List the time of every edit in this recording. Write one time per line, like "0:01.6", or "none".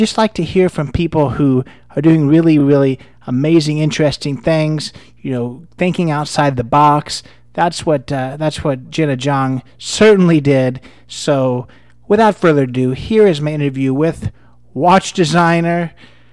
none